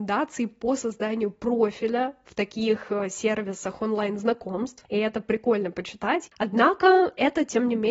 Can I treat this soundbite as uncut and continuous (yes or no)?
no